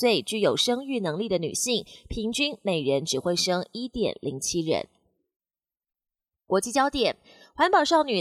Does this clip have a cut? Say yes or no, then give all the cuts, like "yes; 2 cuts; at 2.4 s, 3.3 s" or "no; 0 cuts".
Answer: no; 0 cuts